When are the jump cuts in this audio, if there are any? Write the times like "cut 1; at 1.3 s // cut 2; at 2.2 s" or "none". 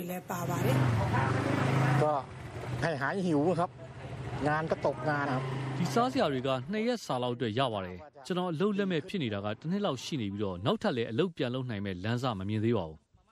cut 1; at 5.3 s